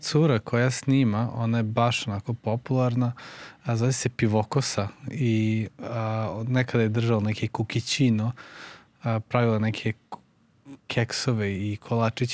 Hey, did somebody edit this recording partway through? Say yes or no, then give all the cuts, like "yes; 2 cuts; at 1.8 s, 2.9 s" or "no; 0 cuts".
yes; 1 cut; at 5.0 s